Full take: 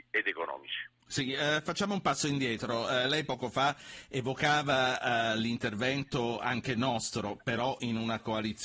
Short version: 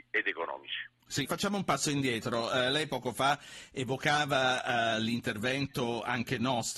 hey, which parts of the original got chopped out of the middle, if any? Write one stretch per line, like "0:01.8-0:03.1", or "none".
0:01.3-0:01.6